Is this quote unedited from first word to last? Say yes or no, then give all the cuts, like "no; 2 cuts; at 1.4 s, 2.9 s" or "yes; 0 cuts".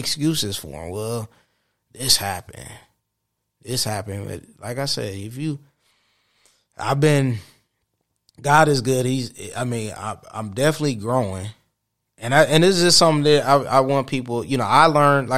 yes; 0 cuts